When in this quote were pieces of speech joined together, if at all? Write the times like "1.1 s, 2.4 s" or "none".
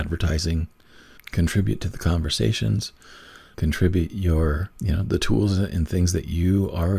1.2 s, 3.5 s, 4.7 s